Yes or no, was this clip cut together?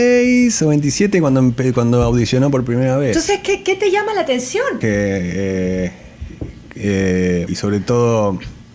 yes